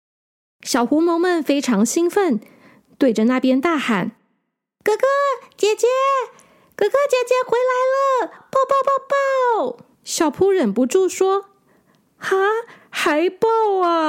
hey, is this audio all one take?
no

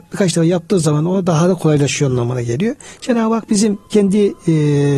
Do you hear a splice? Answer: yes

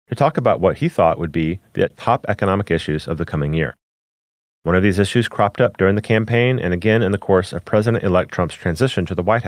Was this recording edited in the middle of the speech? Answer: no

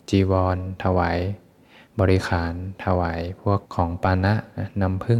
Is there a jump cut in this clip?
yes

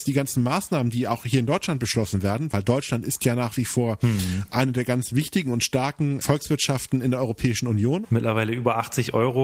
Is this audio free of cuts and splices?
no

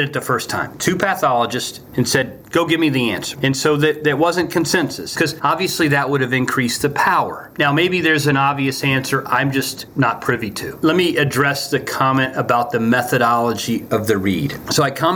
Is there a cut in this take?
yes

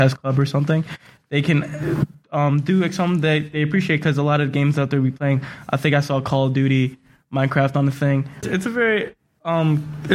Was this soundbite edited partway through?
yes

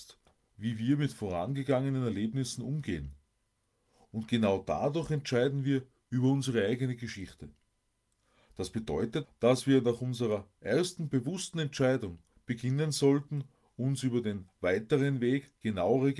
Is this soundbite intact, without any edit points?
no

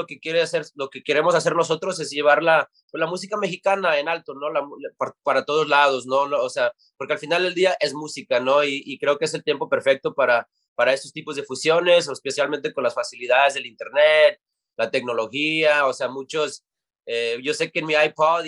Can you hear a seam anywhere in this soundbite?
no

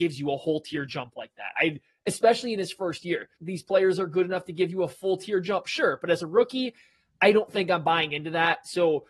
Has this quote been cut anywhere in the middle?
yes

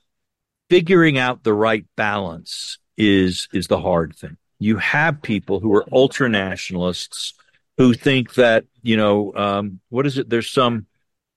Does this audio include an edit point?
yes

